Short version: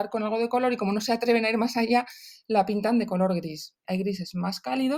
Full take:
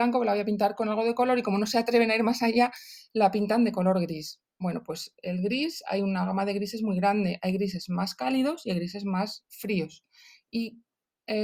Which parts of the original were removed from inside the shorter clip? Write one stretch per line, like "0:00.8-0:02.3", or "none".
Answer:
0:04.5-0:07.4